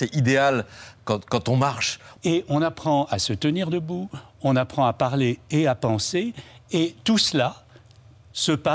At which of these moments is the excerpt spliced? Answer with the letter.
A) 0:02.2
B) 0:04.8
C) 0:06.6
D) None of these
A